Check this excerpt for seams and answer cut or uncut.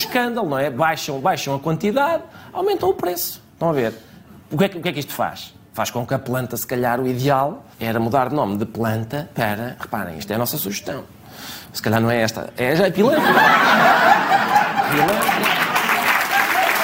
cut